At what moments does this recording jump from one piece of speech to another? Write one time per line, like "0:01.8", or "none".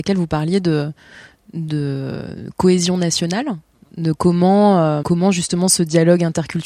0:05.0

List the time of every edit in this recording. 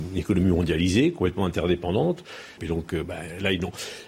0:02.6

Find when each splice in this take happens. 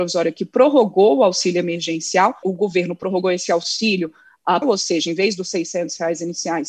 0:02.4
0:04.6

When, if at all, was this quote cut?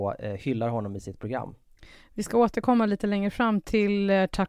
none

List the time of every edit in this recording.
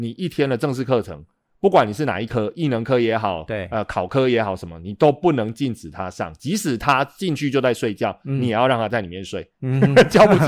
none

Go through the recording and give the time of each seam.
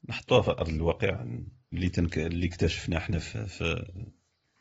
0:01.7

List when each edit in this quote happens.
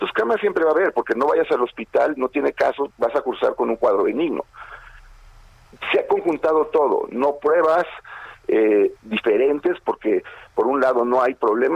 0:02.9
0:08.9

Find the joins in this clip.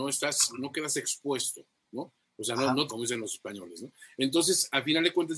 0:02.9

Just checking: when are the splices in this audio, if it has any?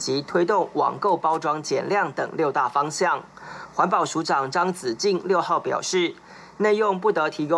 none

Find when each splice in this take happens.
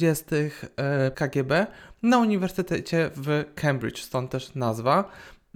0:01.1

